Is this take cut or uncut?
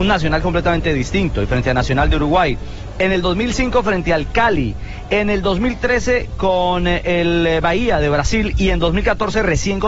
uncut